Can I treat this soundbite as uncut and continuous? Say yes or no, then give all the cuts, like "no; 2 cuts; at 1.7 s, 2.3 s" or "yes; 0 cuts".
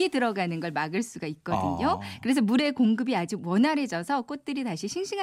yes; 0 cuts